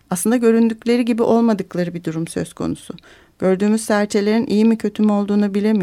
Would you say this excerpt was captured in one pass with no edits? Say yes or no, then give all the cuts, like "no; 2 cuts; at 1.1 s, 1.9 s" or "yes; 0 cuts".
yes; 0 cuts